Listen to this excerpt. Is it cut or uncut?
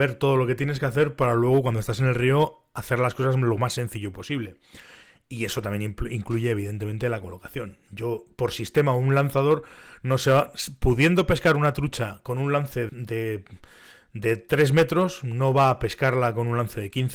cut